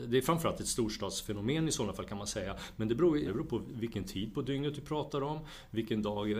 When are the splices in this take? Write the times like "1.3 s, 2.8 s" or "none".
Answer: 3.2 s